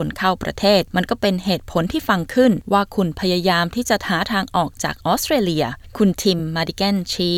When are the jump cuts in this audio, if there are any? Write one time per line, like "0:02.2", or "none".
none

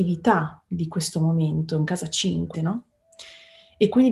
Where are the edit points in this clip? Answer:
0:02.5

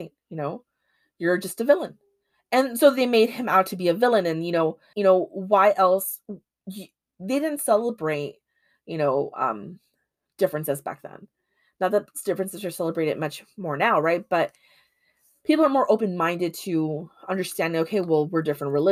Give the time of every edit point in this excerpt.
0:04.9

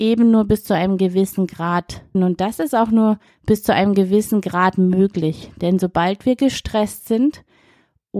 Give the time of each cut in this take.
0:02.1

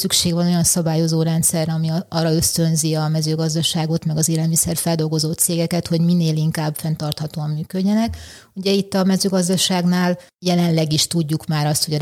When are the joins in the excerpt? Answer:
none

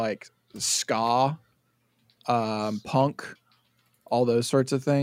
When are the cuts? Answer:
none

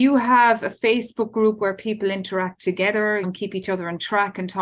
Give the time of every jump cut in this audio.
0:03.2

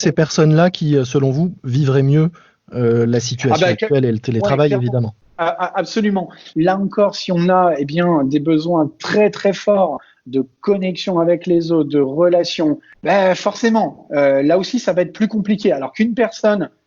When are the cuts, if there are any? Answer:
0:06.5
0:12.9

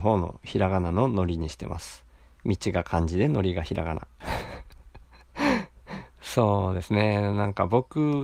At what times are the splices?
0:04.2

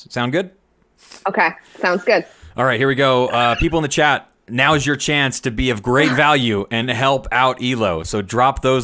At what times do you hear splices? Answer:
none

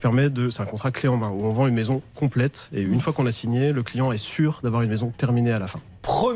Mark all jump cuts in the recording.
none

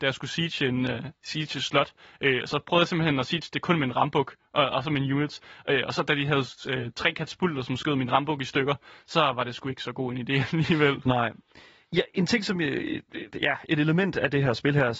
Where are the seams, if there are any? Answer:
none

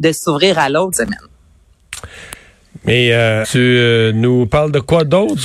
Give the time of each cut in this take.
0:00.9
0:03.4

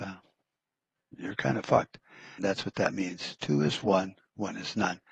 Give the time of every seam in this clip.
0:02.4

